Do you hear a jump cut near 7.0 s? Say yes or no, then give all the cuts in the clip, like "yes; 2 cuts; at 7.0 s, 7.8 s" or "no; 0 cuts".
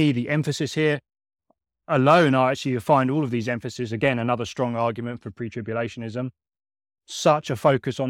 no; 0 cuts